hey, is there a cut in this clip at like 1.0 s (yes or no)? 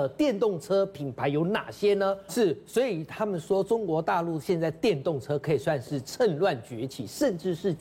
no